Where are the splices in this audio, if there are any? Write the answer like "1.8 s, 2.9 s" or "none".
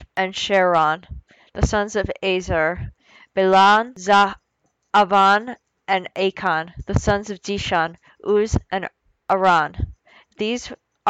none